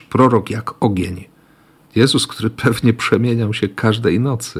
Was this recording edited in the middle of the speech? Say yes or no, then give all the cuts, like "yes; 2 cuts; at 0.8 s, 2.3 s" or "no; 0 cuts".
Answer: yes; 1 cut; at 1.8 s